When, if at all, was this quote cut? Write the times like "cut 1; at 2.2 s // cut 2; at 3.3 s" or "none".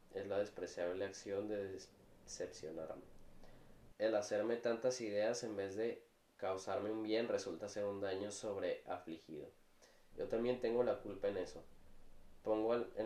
cut 1; at 3.9 s // cut 2; at 10.1 s